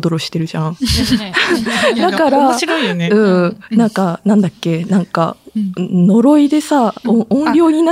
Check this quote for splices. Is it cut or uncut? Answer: uncut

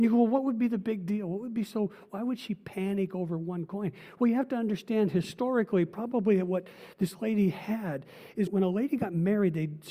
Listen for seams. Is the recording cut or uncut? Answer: cut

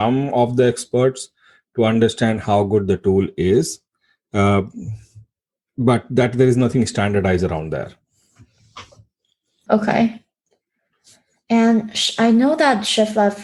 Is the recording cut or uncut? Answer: cut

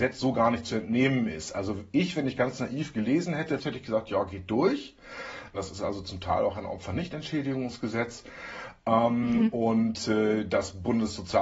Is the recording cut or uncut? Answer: cut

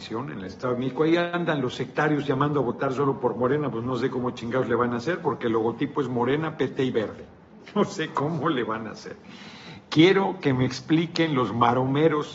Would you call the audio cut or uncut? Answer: uncut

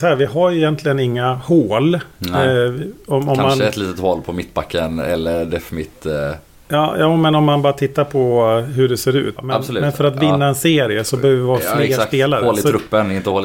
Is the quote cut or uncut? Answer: cut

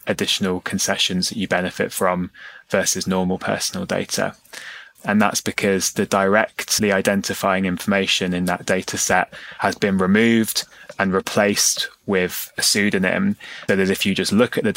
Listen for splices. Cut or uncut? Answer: cut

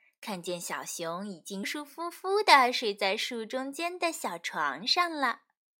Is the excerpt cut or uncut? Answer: cut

